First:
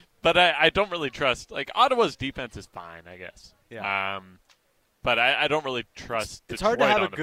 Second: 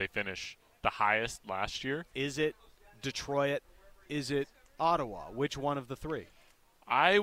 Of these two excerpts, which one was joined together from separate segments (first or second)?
second